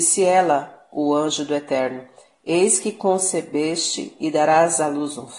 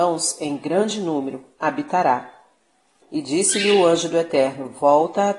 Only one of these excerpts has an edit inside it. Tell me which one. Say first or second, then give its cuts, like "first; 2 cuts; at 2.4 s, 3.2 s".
second; 1 cut; at 3.0 s